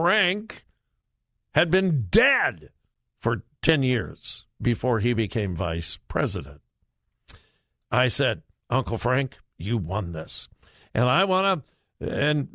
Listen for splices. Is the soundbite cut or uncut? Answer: cut